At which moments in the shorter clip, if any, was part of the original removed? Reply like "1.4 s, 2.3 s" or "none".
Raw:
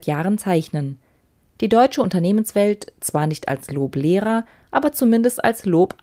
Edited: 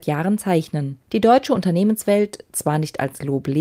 1.0 s